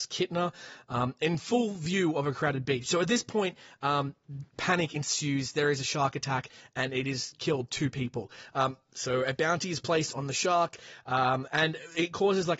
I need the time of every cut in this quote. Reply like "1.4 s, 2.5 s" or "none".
none

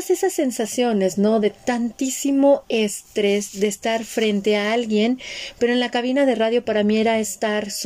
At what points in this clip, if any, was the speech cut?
none

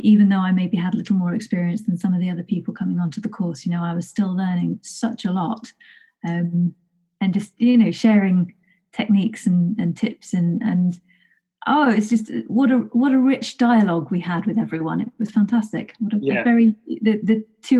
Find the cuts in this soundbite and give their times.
none

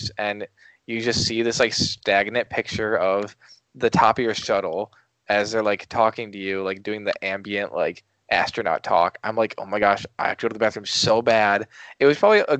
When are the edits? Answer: none

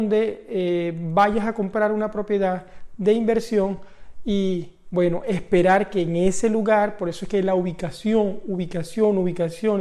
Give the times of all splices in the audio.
none

